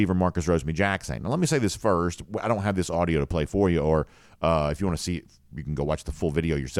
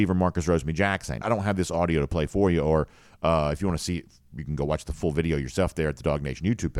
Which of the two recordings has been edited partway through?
second; 1 cut; at 1.2 s

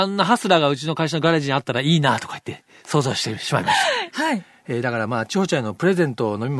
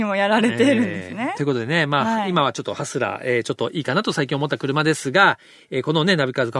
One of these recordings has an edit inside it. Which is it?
first; 1 cut; at 4.1 s

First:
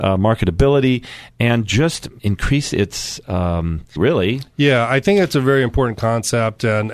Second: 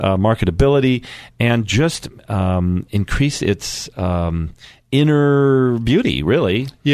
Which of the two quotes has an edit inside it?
first; 2 cuts; at 2.2 s, 4.0 s

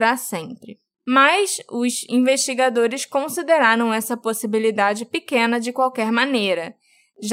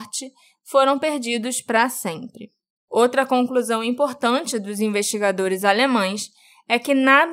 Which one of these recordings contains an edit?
first; 1 cut; at 0.9 s

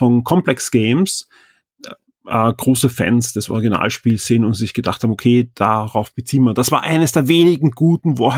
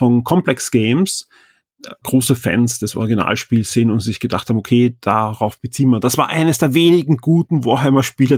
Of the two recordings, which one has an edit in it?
second; 1 cut; at 2.0 s

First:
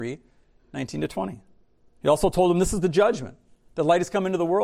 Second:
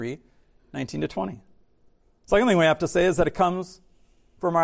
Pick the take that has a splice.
first; 1 cut; at 1.9 s

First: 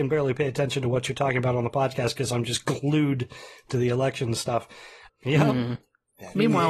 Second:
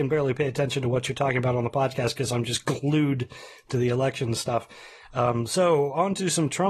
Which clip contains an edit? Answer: first; 1 cut; at 5.1 s

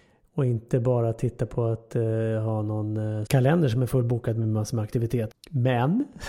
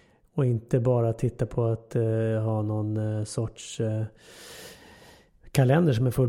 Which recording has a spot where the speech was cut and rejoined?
first; 2 cuts; at 3.3 s, 5.3 s

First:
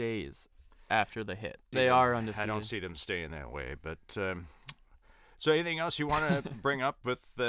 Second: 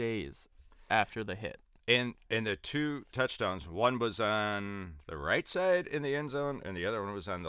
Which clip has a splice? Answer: first; 1 cut; at 1.7 s

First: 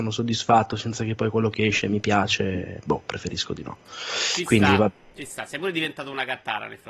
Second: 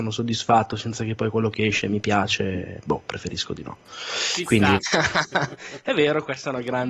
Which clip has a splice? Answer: second; 1 cut; at 4.8 s

